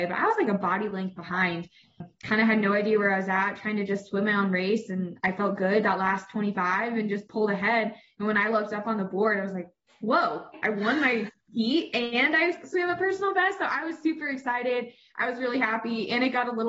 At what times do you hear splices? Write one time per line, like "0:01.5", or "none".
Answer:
none